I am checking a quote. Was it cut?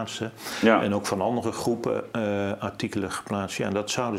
no; 0 cuts

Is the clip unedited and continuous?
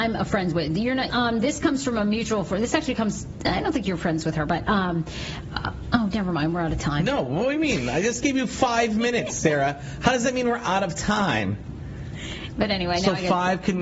no; 2 cuts; at 1.1 s, 12.5 s

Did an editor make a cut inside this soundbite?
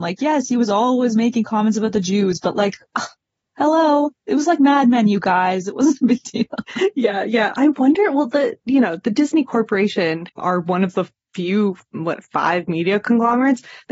no; 0 cuts

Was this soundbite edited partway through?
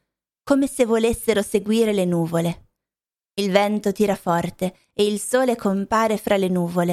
yes; 1 cut; at 3.2 s

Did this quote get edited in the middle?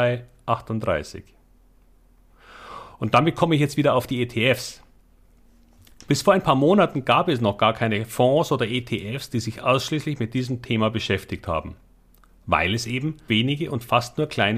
yes; 1 cut; at 13.3 s

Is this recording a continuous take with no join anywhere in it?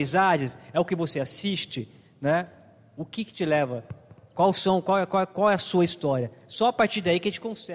yes; 0 cuts

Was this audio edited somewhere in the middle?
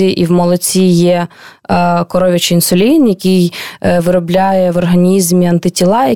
no; 0 cuts

